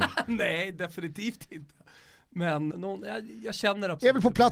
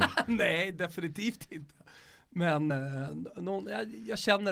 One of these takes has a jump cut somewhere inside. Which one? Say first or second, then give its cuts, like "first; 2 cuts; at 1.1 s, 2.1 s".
first; 1 cut; at 2.7 s